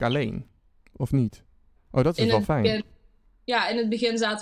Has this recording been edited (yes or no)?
yes